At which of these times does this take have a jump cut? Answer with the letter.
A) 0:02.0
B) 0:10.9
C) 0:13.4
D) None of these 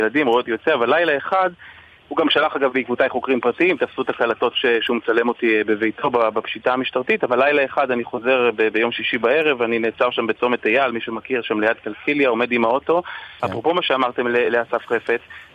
C